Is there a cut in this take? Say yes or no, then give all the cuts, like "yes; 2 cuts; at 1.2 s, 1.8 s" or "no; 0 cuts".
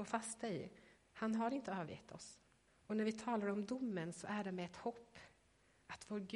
yes; 2 cuts; at 1.0 s, 2.7 s